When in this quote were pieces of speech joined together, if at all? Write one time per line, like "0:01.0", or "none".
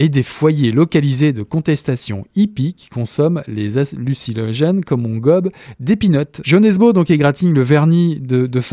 0:06.4